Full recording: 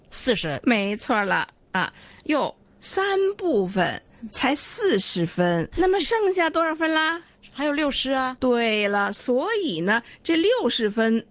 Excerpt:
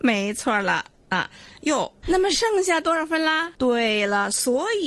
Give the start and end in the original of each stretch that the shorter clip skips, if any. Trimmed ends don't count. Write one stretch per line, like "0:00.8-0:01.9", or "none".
0:02.6-0:05.7
0:07.2-0:08.4